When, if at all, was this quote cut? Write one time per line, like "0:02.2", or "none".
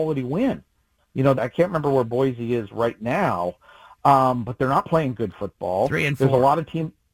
0:01.4